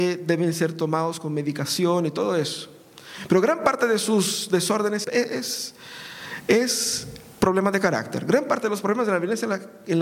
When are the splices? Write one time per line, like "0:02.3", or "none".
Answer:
0:05.0